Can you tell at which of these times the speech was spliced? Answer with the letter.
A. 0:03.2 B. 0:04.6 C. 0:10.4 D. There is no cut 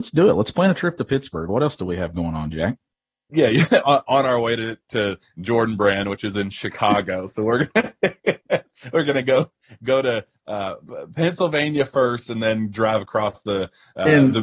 D